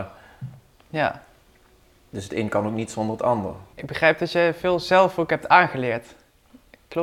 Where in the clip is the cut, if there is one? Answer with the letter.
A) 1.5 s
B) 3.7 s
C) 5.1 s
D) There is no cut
B